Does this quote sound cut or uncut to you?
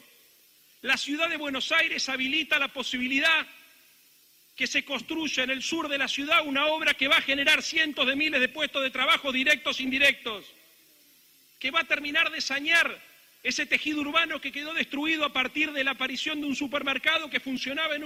uncut